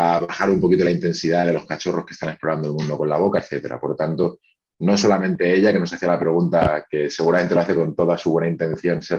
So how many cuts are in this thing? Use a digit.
0